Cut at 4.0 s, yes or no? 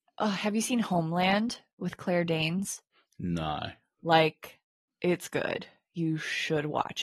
yes